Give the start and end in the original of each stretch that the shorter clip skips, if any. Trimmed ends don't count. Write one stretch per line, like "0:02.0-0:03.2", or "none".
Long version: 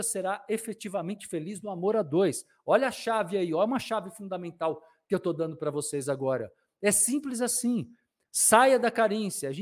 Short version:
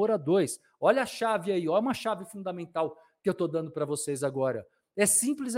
none